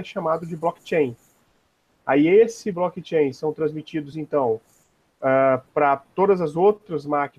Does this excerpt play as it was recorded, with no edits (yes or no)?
yes